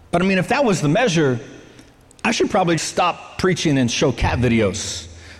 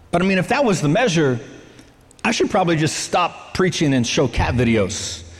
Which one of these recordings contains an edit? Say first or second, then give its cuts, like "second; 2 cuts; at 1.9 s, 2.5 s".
first; 1 cut; at 2.8 s